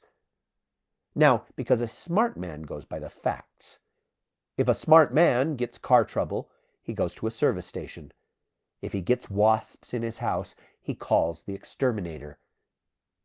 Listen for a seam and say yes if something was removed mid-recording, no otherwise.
yes